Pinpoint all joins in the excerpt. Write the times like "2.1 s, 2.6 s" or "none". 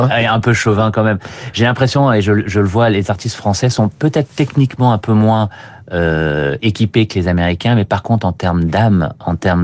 none